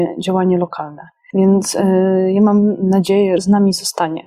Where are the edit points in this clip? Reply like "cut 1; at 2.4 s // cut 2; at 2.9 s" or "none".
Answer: cut 1; at 1.3 s // cut 2; at 3.4 s